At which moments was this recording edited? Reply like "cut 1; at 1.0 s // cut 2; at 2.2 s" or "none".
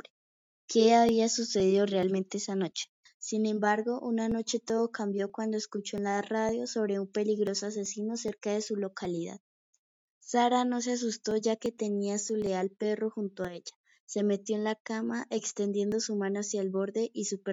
cut 1; at 3.1 s